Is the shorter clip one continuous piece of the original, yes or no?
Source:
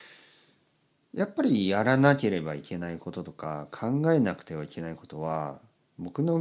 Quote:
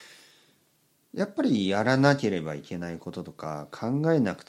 yes